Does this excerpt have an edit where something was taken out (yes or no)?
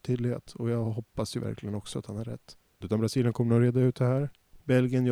yes